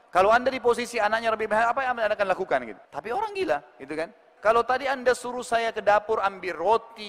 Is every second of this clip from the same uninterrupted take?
no; 2 cuts; at 2.8 s, 4.4 s

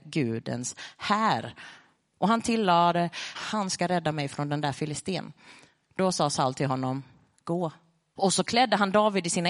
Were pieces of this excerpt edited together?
yes; 2 cuts; at 3.3 s, 8.2 s

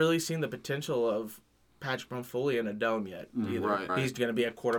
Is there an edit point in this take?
yes; 1 cut; at 3.9 s

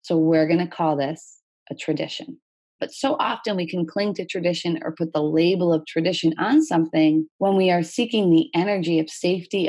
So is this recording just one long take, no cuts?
no; 2 cuts; at 2.8 s, 7.3 s

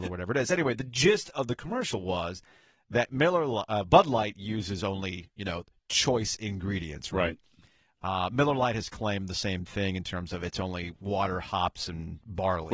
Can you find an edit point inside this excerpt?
no; 0 cuts

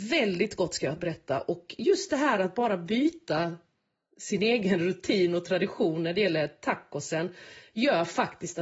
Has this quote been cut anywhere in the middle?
no; 0 cuts

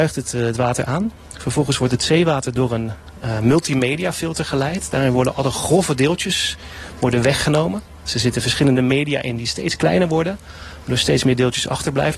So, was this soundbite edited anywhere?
no; 0 cuts

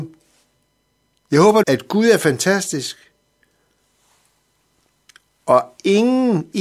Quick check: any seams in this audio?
yes; 1 cut; at 1.6 s

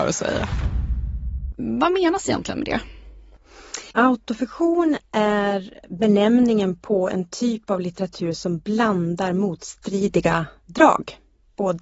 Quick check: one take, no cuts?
no; 2 cuts; at 1.5 s, 3.9 s

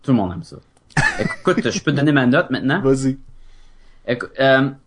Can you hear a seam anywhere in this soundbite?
no; 0 cuts

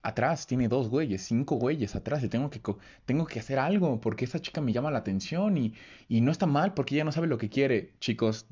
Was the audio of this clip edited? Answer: no; 0 cuts

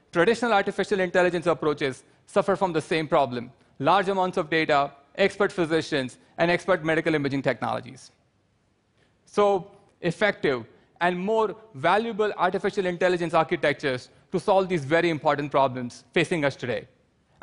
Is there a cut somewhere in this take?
yes; 1 cut; at 9.9 s

